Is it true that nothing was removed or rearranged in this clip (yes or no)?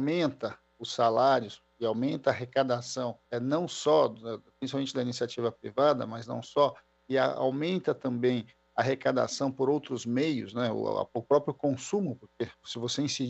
no